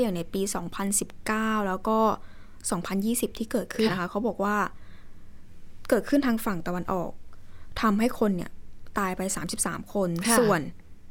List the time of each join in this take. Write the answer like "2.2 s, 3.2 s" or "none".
3.9 s